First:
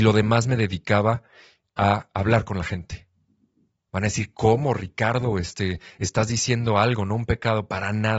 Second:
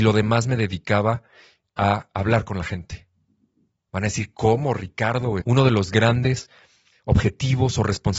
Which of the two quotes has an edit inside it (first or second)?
second